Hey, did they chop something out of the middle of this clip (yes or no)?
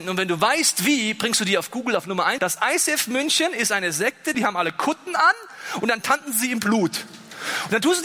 yes